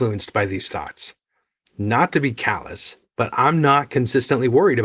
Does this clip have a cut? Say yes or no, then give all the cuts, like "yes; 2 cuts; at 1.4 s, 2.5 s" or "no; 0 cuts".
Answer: no; 0 cuts